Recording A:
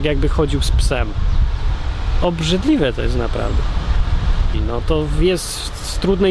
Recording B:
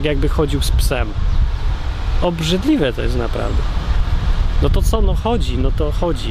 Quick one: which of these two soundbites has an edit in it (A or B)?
A